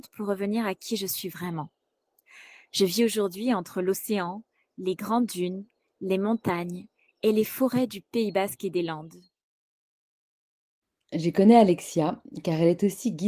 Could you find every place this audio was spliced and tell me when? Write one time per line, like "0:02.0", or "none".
none